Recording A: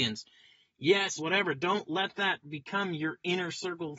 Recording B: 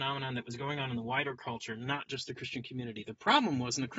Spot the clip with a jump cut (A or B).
A